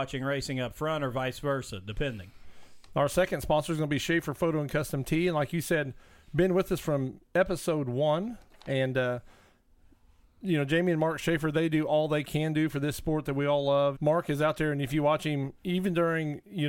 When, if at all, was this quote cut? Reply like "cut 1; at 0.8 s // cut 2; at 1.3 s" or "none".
cut 1; at 14.0 s